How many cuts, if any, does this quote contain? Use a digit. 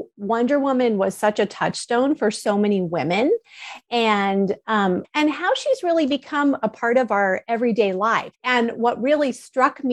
2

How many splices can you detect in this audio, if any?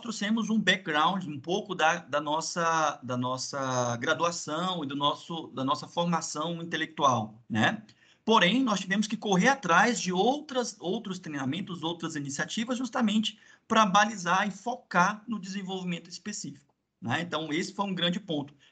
0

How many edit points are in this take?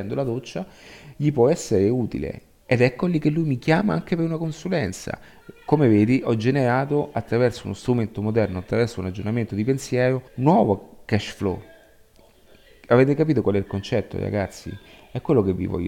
1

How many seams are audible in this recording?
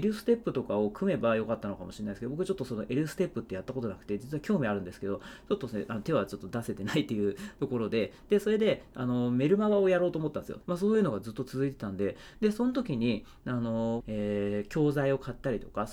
3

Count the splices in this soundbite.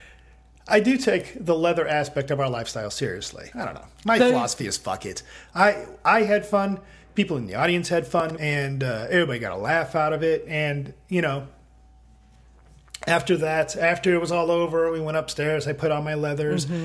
2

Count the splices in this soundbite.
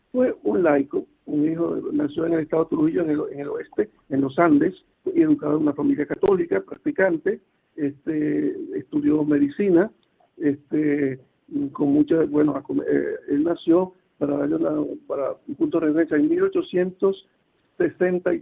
1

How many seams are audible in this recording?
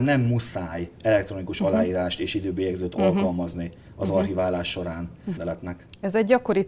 1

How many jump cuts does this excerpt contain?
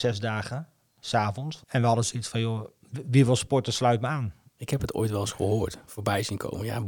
2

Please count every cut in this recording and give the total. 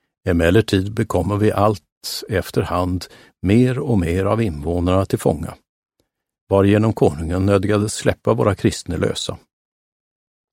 0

